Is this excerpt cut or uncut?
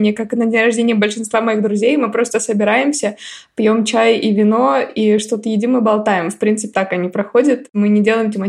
cut